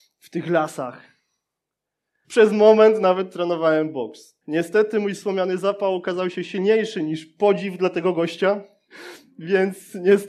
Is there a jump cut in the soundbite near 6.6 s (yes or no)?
no